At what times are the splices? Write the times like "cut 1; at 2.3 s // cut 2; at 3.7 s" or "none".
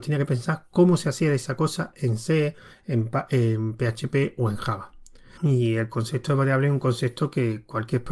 cut 1; at 5.4 s